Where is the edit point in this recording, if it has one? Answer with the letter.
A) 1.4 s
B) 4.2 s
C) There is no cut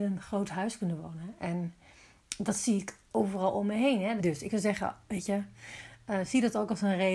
B